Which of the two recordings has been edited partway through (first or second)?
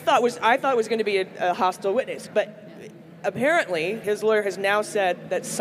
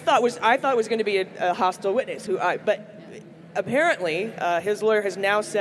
first